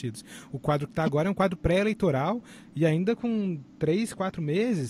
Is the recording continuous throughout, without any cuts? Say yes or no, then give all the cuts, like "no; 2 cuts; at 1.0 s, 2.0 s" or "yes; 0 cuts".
yes; 0 cuts